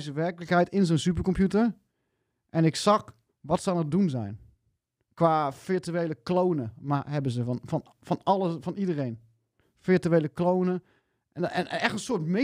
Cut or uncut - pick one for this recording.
uncut